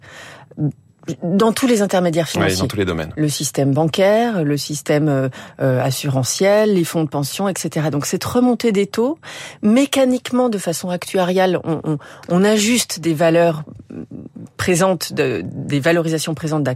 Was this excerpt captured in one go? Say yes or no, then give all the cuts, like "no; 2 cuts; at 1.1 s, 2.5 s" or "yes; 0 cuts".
no; 1 cut; at 11.8 s